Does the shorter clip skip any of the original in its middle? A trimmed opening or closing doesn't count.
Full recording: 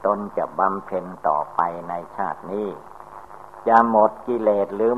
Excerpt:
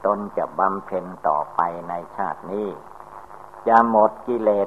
no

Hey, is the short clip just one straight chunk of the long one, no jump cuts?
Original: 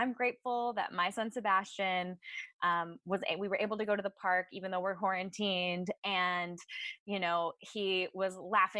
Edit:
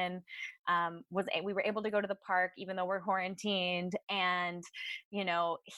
yes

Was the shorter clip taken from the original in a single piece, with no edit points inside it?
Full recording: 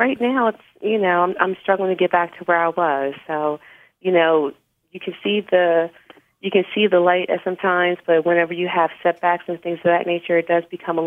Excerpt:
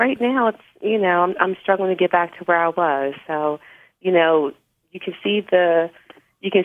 yes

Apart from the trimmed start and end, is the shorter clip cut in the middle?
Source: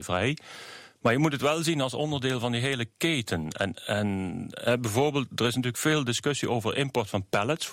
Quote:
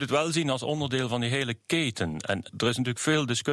yes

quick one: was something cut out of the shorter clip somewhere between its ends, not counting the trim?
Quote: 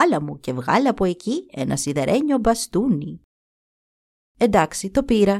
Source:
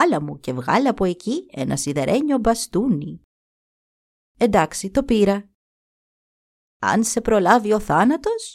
no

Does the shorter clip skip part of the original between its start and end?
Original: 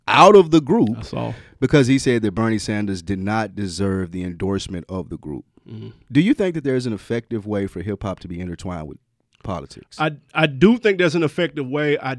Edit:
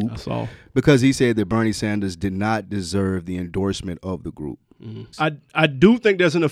yes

